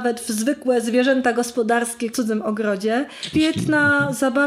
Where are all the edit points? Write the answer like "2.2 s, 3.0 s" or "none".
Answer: 2.1 s, 3.3 s